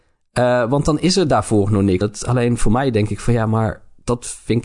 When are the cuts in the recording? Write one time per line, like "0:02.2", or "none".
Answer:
0:02.0